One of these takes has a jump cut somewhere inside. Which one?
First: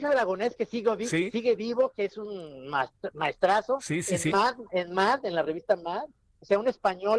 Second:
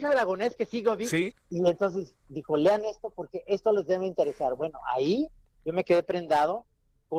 second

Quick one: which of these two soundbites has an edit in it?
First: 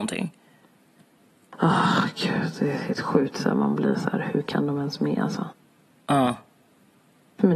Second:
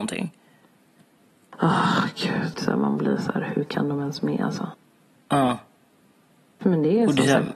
second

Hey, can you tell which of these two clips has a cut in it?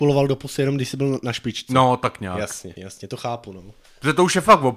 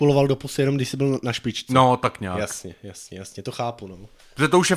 first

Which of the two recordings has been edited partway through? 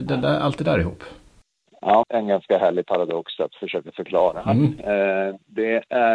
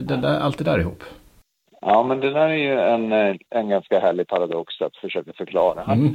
first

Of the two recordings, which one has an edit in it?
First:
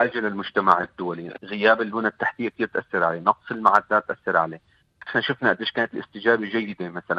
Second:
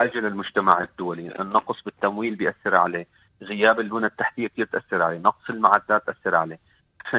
first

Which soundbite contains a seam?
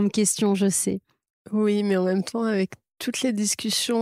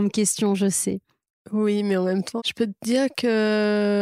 second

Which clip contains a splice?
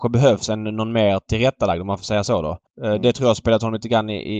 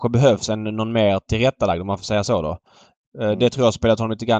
first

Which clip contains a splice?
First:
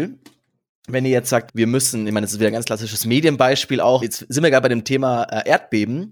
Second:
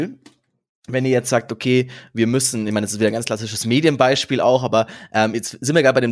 first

